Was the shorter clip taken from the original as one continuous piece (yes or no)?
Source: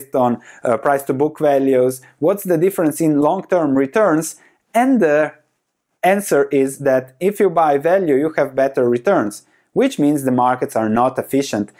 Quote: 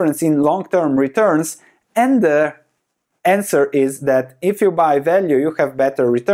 yes